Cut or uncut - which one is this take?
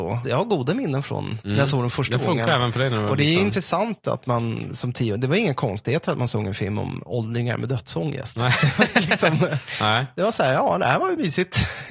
uncut